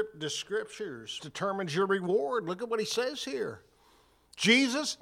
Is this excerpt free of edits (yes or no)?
no